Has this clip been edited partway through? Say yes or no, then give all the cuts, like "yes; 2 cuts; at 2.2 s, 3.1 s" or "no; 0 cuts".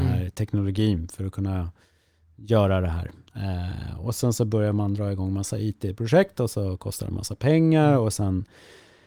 no; 0 cuts